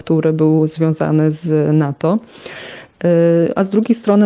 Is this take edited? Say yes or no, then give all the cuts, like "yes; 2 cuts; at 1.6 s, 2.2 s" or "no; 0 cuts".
no; 0 cuts